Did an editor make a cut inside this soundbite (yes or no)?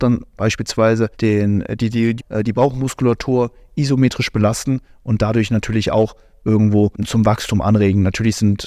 yes